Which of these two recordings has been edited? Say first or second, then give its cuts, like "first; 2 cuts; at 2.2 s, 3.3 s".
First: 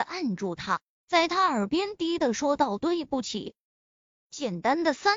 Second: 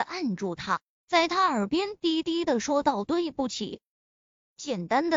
first; 1 cut; at 2.0 s